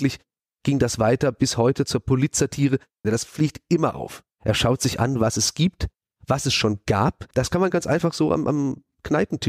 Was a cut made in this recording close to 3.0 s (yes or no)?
yes